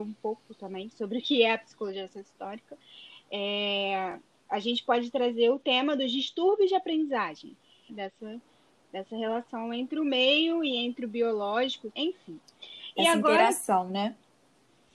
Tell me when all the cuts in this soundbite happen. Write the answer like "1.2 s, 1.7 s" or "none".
7.9 s, 11.9 s